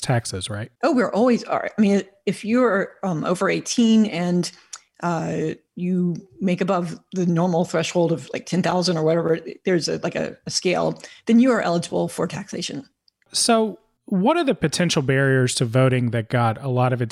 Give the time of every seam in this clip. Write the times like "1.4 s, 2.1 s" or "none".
none